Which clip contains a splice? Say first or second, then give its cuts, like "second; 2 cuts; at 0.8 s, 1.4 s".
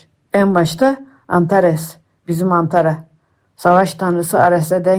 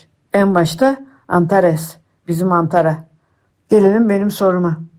second; 1 cut; at 3.5 s